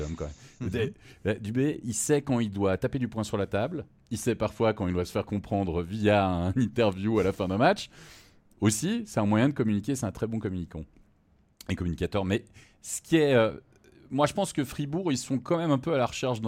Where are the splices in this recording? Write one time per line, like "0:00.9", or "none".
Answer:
none